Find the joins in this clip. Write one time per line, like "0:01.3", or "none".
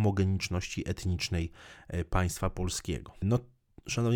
0:03.2